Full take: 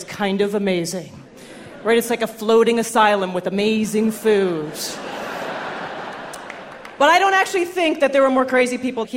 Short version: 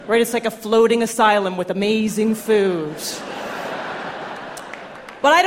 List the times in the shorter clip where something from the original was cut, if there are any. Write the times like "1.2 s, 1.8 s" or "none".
none